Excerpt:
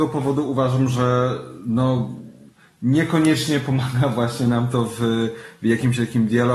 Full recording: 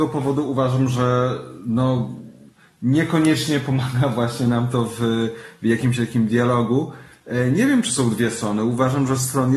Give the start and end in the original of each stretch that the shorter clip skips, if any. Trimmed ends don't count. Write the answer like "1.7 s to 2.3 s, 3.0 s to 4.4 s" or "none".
none